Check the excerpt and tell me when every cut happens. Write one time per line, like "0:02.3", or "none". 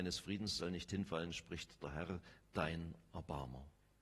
none